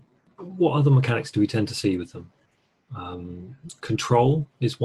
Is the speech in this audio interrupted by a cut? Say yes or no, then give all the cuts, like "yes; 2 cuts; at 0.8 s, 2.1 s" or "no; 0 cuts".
no; 0 cuts